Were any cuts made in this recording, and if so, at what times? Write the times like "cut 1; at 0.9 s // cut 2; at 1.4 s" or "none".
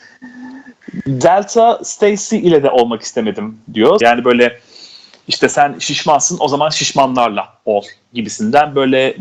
cut 1; at 4.0 s